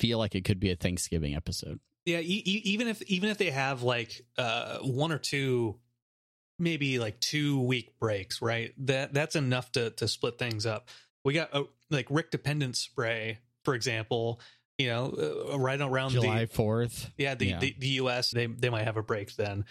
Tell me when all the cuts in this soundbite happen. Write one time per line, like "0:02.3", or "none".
0:18.3